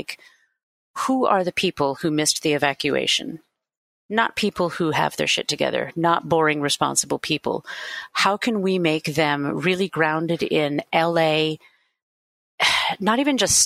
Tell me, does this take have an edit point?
no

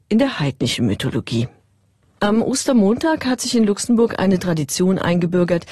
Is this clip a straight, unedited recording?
yes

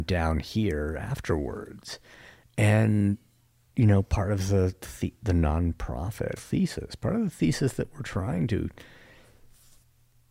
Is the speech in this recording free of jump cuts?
no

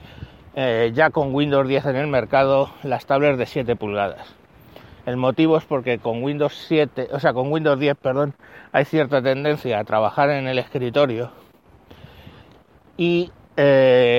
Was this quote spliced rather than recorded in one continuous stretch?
no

